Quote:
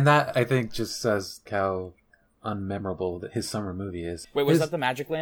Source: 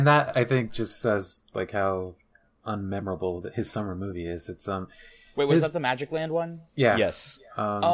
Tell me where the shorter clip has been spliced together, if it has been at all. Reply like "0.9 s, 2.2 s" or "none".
1.5 s, 4.2 s